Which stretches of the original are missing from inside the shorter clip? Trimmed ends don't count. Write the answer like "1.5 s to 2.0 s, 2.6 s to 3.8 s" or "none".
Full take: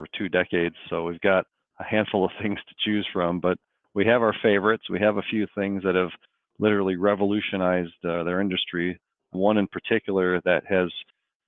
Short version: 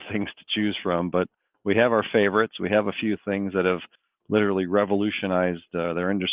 none